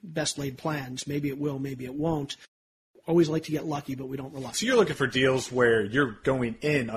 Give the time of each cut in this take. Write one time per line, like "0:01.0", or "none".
none